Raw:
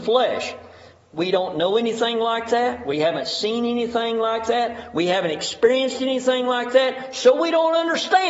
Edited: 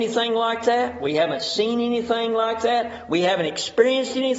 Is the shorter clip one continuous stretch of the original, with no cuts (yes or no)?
yes